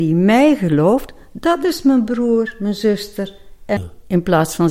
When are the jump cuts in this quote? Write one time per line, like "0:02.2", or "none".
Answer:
0:03.8